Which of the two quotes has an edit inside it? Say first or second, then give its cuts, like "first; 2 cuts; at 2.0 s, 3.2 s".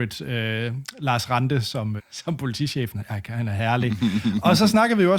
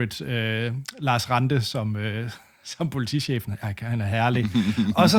first; 1 cut; at 2.0 s